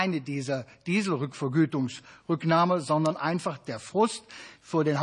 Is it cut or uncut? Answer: uncut